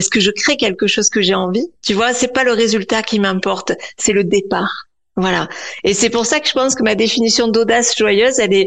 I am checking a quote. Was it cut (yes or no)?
yes